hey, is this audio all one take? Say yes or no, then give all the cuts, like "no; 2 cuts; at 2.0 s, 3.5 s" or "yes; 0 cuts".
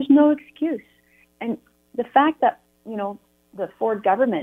yes; 0 cuts